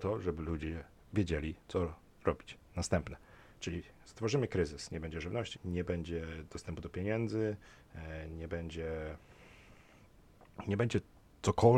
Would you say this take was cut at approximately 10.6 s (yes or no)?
no